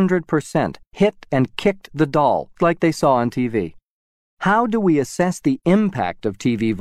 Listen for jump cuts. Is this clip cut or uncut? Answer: cut